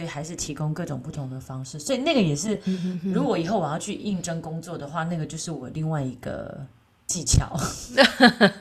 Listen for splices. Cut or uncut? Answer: uncut